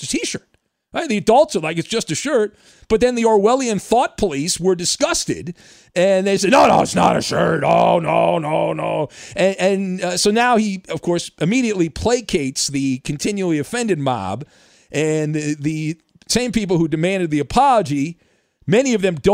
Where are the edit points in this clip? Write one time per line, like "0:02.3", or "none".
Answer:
none